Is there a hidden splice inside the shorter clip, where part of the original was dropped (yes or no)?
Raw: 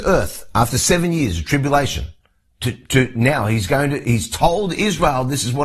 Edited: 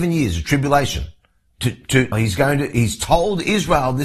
yes